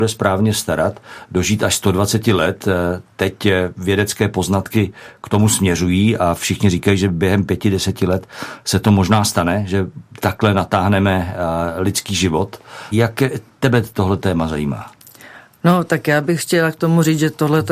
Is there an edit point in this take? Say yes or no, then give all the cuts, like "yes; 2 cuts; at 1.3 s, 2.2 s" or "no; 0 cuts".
no; 0 cuts